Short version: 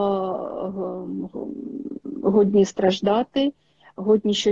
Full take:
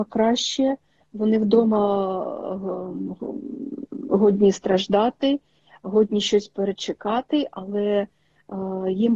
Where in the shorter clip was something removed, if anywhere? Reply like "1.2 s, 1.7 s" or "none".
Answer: none